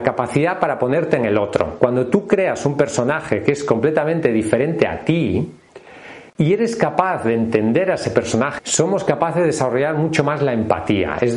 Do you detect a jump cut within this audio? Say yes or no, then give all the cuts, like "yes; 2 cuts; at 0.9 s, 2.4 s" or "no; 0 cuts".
yes; 2 cuts; at 6.3 s, 8.6 s